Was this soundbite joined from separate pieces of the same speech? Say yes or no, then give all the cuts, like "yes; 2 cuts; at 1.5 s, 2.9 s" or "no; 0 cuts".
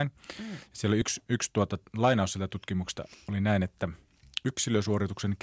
no; 0 cuts